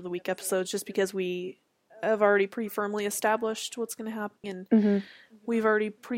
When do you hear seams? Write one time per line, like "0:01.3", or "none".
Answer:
0:04.4